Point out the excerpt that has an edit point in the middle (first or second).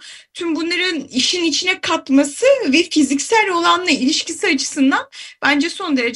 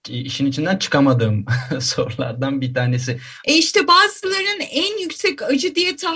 second